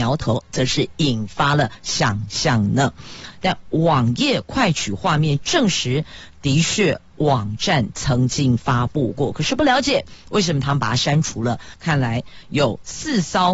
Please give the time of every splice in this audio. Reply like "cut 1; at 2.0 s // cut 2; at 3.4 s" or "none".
cut 1; at 3.3 s // cut 2; at 11.7 s